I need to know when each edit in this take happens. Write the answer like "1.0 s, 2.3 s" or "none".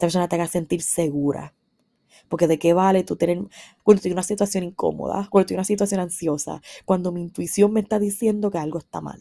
3.8 s